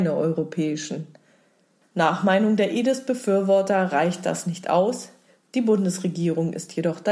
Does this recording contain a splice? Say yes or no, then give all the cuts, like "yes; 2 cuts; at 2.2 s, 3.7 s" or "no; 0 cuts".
no; 0 cuts